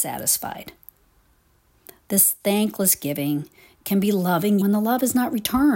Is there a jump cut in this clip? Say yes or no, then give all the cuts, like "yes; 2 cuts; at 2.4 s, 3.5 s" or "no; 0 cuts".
yes; 1 cut; at 4.6 s